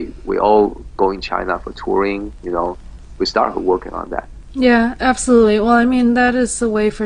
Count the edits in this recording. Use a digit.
0